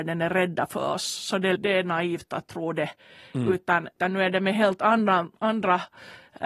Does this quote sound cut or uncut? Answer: cut